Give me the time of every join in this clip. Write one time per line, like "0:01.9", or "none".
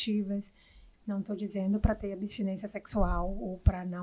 0:00.9

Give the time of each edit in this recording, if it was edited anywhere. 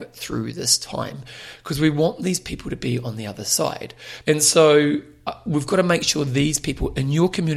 0:04.2

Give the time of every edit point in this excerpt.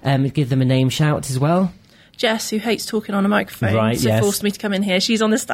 none

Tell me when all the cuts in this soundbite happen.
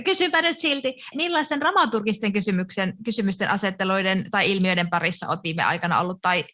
0:01.1

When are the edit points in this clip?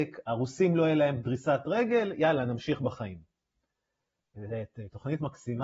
none

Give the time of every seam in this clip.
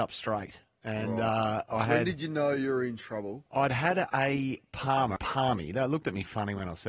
0:05.2

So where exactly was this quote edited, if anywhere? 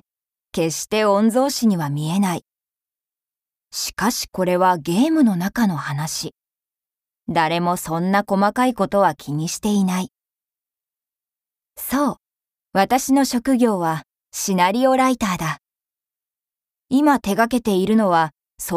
none

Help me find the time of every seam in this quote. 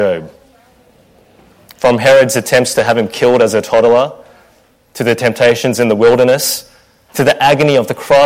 none

